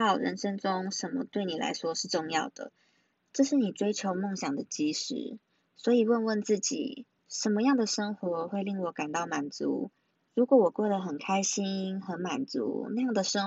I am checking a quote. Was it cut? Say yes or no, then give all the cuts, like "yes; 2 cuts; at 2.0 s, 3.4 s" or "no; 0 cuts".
no; 0 cuts